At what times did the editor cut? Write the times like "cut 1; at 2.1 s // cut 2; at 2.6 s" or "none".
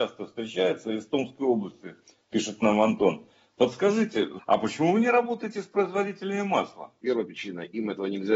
cut 1; at 4.4 s // cut 2; at 7.0 s